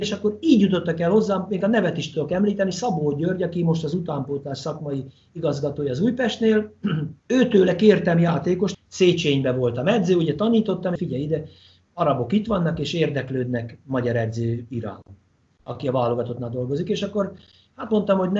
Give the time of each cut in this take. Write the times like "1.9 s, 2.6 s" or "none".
7.2 s, 8.7 s, 11.0 s